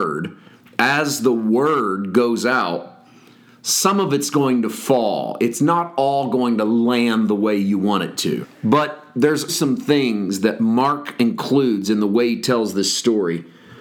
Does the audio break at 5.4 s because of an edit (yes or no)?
no